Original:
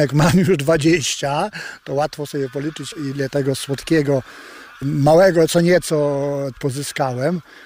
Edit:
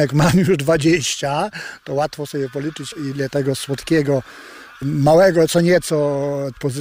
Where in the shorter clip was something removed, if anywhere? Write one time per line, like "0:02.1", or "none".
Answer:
none